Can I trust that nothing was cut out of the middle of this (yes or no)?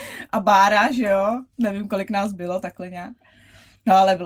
yes